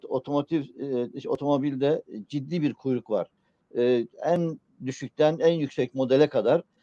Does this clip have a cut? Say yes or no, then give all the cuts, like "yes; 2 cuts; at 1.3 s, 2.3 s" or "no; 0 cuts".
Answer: no; 0 cuts